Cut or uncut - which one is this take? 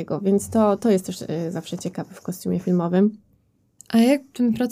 cut